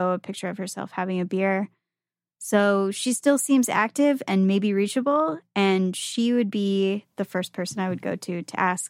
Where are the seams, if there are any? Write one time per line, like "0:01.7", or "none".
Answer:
none